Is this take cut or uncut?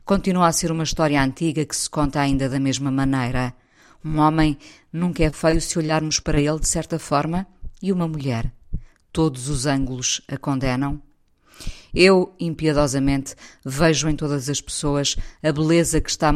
uncut